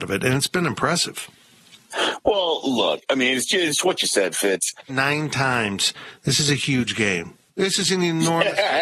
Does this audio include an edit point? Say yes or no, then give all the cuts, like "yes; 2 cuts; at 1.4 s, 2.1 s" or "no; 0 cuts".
yes; 1 cut; at 4.9 s